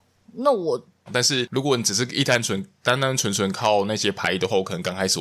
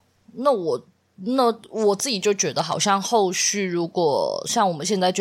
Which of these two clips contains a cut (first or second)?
first